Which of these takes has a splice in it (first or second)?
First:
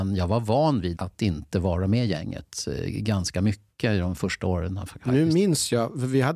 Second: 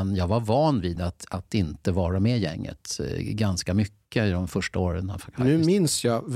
first